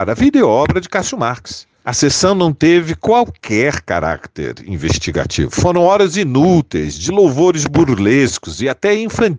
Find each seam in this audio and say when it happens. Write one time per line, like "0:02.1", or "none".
none